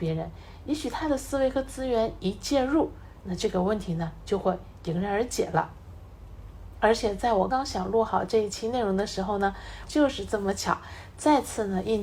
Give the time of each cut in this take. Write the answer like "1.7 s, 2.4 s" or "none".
7.5 s, 9.8 s